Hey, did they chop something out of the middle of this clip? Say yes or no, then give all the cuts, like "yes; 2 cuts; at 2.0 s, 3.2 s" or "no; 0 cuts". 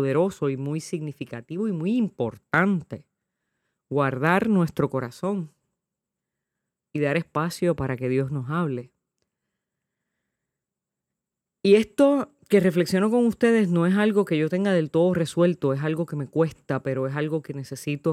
no; 0 cuts